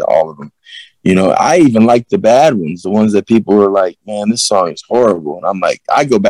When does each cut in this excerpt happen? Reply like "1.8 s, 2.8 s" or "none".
none